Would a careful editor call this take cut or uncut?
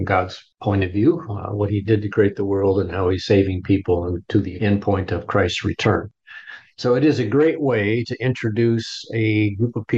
uncut